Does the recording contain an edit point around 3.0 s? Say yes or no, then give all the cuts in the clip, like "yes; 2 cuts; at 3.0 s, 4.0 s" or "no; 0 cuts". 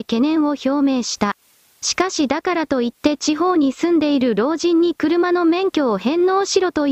no; 1 cut; at 1.6 s